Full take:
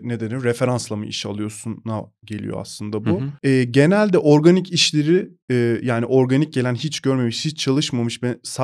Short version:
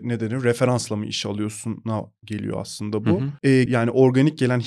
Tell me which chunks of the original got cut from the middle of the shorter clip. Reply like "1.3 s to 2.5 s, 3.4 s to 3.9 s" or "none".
3.7 s to 5.8 s